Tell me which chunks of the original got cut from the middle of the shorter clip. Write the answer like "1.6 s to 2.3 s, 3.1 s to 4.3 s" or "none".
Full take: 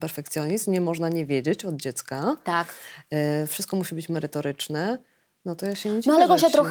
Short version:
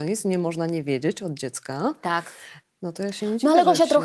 3.0 s to 5.2 s